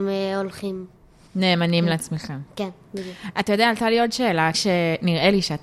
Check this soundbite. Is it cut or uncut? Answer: cut